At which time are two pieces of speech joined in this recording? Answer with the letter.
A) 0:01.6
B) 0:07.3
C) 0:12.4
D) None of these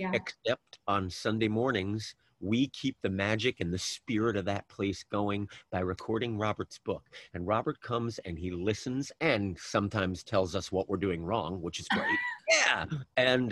C